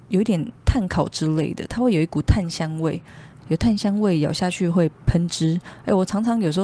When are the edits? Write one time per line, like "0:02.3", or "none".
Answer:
0:03.4